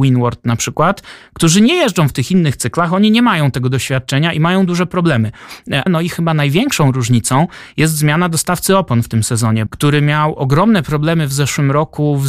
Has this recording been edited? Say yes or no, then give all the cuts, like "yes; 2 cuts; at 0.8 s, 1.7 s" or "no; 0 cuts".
yes; 2 cuts; at 5.9 s, 9.7 s